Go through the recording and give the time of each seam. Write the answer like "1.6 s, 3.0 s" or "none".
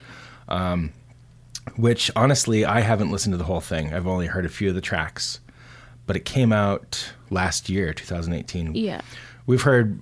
8.7 s